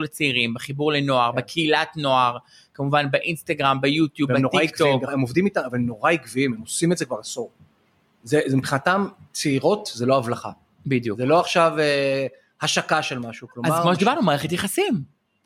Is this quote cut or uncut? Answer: uncut